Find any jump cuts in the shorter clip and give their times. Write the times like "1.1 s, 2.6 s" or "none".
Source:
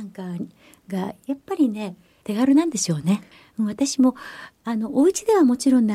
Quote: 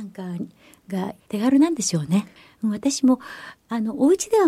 1.2 s